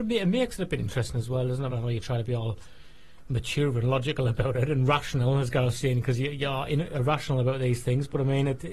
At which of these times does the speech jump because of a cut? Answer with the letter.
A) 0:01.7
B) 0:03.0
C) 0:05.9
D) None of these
A